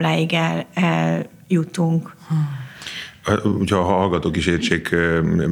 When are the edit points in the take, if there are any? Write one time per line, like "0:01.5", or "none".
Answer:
none